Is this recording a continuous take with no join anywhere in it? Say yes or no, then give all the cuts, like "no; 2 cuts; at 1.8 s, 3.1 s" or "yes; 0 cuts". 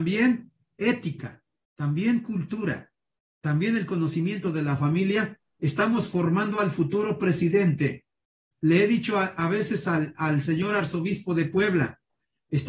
yes; 0 cuts